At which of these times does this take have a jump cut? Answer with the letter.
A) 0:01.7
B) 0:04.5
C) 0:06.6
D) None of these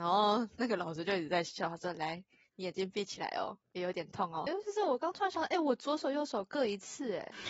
B